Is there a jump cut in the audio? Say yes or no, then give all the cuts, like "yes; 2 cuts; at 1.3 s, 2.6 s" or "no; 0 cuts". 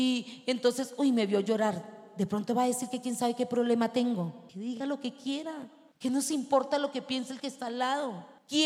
no; 0 cuts